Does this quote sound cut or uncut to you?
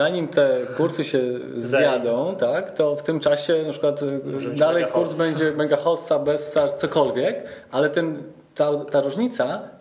uncut